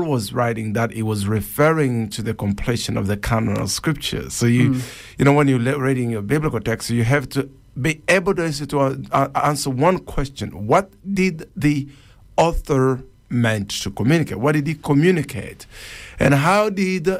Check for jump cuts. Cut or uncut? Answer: uncut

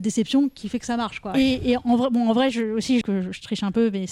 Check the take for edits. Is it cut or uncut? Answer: cut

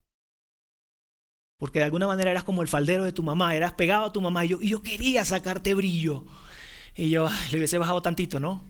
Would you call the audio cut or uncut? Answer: uncut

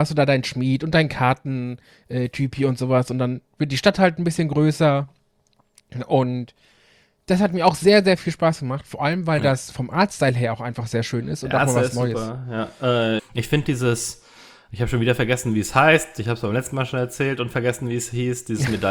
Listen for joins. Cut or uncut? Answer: cut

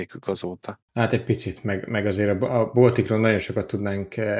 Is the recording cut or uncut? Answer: uncut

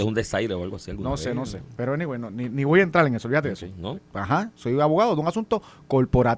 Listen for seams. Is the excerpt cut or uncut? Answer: cut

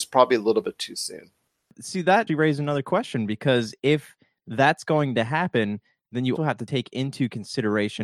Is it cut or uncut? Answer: cut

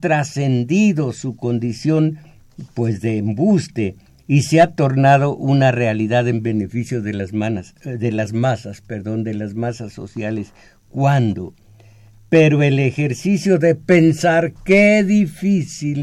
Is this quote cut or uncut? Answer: uncut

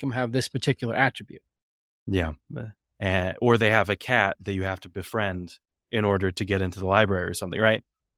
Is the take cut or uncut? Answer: cut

